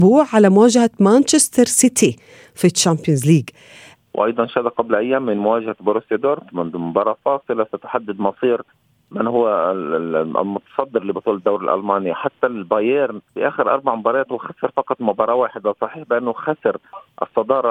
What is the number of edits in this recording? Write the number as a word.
two